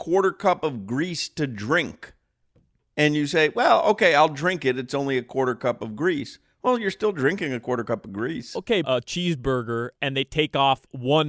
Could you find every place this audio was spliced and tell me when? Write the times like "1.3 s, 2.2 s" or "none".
8.8 s